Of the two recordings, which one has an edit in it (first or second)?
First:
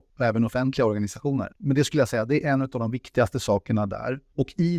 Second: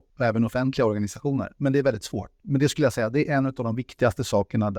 first